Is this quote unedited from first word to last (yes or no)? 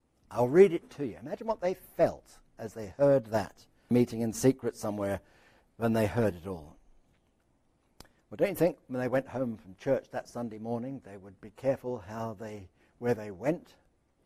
no